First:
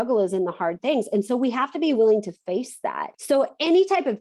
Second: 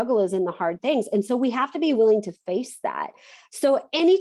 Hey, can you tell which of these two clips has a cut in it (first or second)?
first